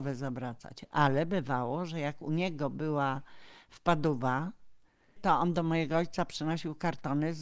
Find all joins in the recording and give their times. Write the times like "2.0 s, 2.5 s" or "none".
5.2 s